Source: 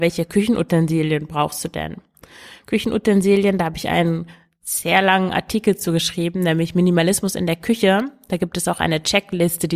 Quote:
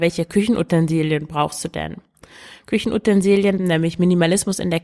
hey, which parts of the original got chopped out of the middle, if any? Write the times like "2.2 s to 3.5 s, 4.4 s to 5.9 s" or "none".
3.6 s to 6.3 s